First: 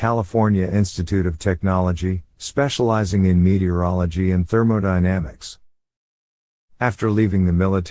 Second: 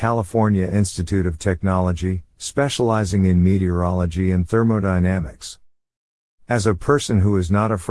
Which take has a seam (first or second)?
second